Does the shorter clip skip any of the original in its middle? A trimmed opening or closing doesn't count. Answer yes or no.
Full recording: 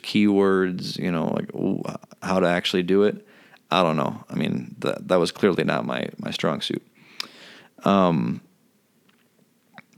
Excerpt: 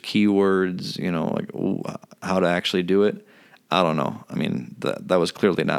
no